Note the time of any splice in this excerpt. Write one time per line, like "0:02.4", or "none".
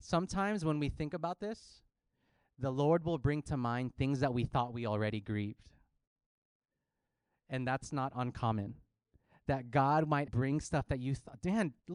0:10.3